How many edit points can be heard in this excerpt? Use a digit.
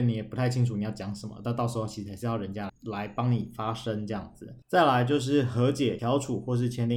3